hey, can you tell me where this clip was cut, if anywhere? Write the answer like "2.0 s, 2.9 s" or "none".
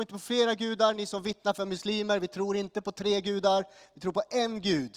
none

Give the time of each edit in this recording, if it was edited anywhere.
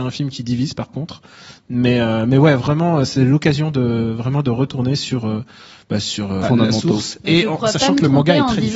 6.4 s

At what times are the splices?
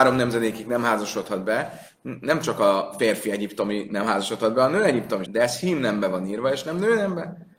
5.2 s

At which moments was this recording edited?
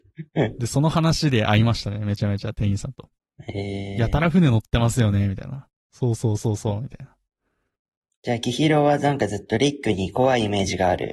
none

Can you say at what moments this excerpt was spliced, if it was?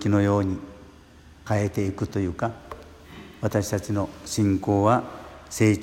1.5 s

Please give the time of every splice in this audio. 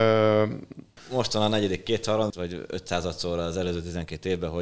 1.0 s, 2.3 s

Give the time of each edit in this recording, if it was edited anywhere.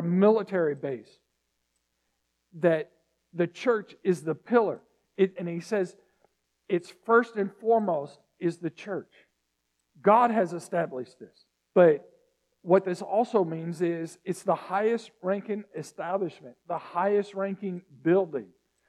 5.4 s, 11.7 s

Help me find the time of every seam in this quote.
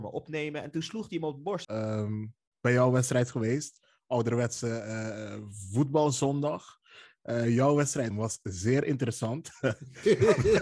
1.6 s, 8.1 s

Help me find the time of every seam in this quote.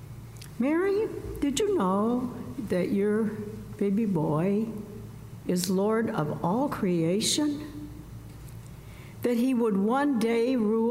none

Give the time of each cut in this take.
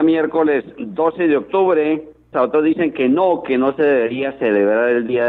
2.3 s

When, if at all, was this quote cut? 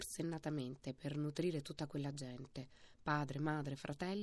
none

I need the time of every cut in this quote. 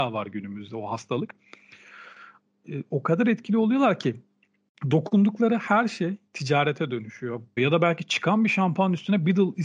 6.3 s, 7.6 s

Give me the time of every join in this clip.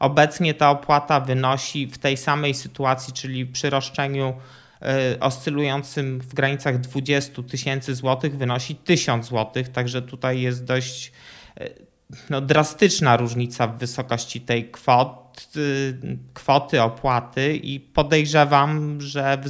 none

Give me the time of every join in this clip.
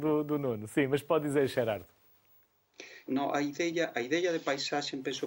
3.1 s

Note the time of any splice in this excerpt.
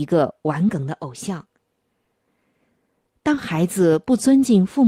none

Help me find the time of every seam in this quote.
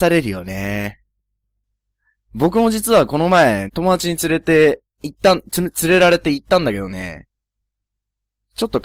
3.7 s, 4.9 s

